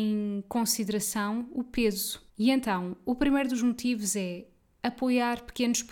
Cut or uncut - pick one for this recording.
cut